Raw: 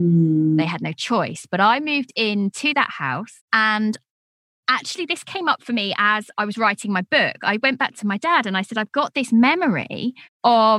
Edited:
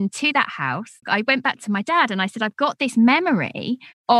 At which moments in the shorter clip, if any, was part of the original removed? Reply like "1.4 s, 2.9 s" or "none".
1.0 s